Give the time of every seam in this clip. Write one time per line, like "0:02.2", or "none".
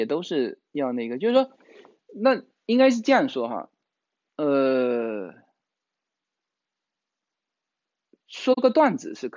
none